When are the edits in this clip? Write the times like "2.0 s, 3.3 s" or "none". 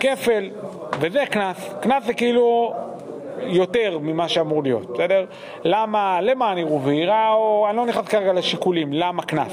none

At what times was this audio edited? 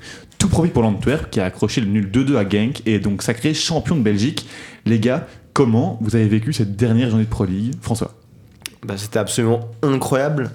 none

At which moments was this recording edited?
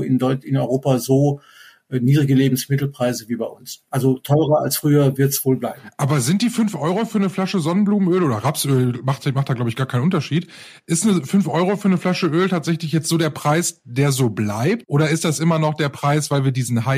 none

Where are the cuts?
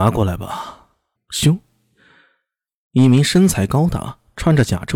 1.2 s

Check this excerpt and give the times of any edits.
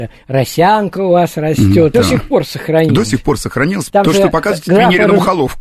1.9 s, 3.9 s

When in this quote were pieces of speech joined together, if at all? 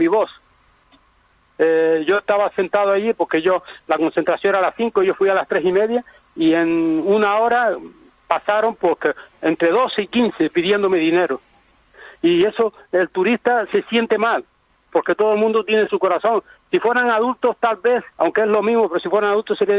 18.1 s

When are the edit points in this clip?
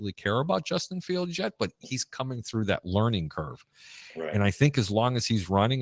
none

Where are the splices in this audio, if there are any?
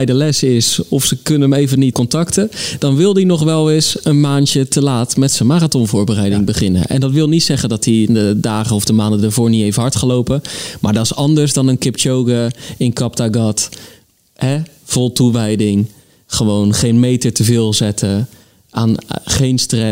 1.9 s

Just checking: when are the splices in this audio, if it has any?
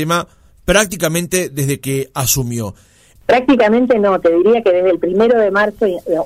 3.2 s

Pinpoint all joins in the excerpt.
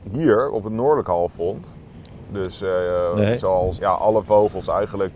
3.8 s

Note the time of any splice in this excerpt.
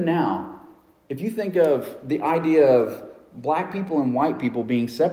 none

